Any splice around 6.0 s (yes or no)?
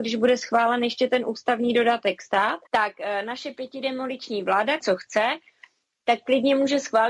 no